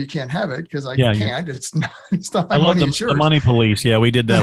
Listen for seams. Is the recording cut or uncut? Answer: uncut